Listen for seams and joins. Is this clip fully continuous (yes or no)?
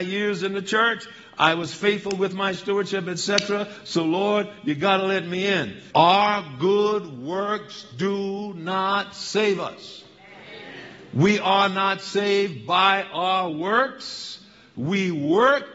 no